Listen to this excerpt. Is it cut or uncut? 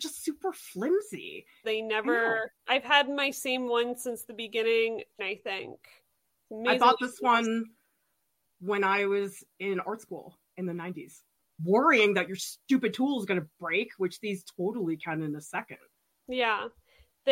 cut